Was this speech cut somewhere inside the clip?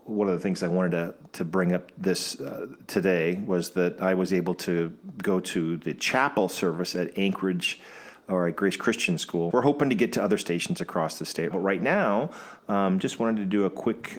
yes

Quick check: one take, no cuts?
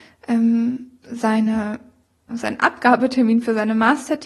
no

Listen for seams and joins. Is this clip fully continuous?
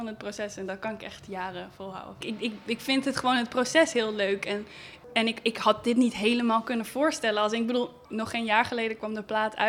no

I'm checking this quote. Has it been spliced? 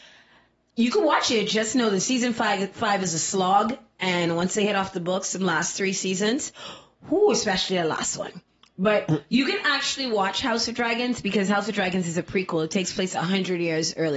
no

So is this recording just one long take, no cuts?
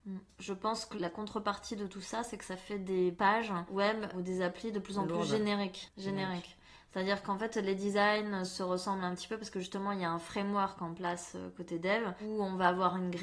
yes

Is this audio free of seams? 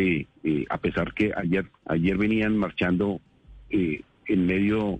no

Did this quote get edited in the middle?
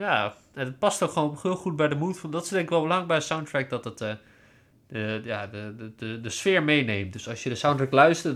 no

